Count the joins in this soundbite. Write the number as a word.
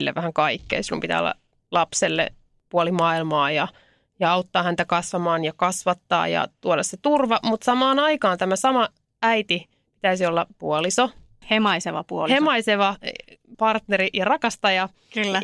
two